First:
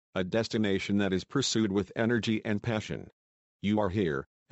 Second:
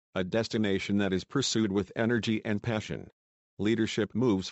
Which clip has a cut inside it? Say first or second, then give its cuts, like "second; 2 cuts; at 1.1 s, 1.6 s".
second; 1 cut; at 3.4 s